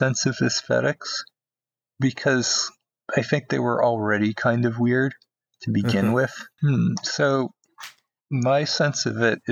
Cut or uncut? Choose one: cut